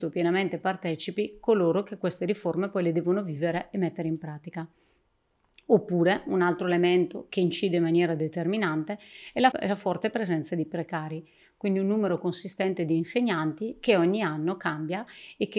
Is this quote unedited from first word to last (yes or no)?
no